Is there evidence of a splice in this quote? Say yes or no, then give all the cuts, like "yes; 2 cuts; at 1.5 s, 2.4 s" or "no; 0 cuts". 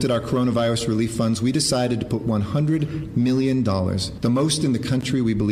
no; 0 cuts